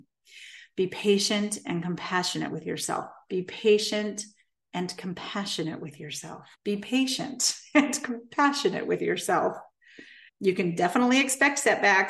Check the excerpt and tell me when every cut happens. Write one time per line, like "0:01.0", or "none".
0:06.5
0:10.3